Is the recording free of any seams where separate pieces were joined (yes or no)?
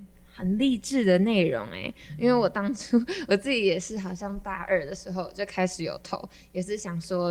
yes